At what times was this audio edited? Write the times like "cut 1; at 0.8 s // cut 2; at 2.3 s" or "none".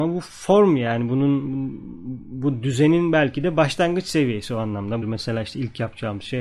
cut 1; at 5.0 s